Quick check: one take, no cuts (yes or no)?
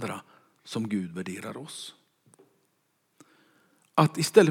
yes